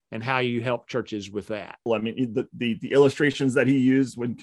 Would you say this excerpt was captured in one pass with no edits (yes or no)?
no